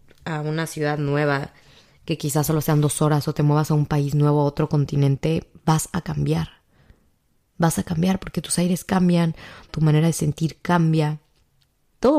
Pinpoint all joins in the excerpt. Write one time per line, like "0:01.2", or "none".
0:09.7